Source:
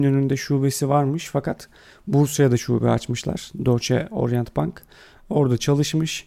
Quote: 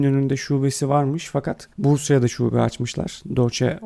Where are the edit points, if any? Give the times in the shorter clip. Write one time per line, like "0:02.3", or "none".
0:01.7